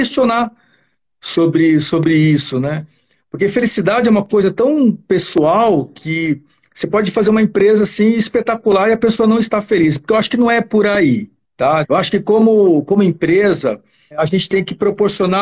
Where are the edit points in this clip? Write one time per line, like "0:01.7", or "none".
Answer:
0:11.8
0:14.1